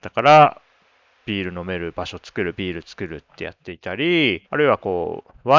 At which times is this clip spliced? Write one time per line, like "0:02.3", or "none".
0:04.5